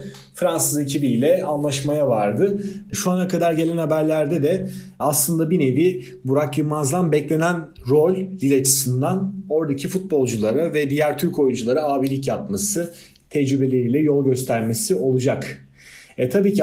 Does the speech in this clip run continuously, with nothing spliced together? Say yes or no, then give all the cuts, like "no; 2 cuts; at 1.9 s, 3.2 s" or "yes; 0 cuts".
no; 1 cut; at 2.9 s